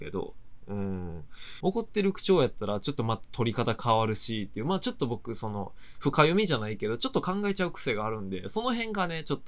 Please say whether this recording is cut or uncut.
cut